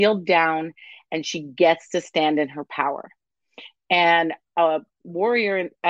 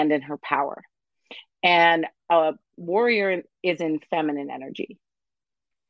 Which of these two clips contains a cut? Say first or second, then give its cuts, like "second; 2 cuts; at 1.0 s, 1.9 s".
second; 1 cut; at 3.5 s